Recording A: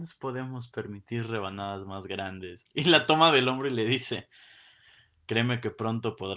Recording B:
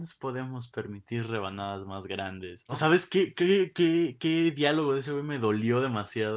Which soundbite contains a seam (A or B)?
B